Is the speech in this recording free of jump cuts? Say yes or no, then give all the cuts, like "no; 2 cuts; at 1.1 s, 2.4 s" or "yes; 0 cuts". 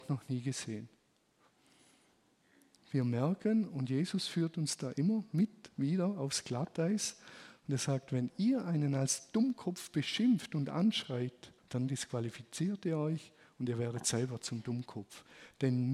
no; 1 cut; at 11.6 s